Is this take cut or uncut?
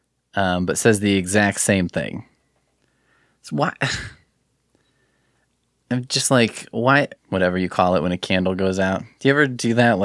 cut